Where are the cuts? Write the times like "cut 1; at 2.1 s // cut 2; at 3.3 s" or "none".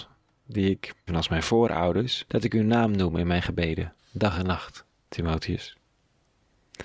cut 1; at 1.1 s // cut 2; at 2.3 s // cut 3; at 4.0 s